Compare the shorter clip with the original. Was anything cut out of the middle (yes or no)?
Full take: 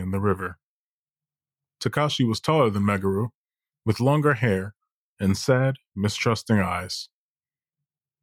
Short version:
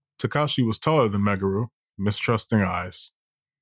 yes